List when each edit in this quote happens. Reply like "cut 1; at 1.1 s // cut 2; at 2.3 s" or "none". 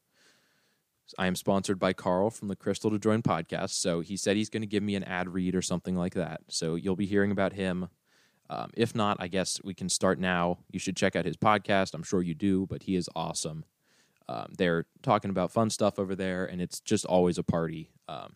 none